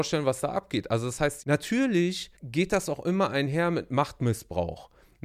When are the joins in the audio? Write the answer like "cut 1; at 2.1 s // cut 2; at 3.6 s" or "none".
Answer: cut 1; at 2.4 s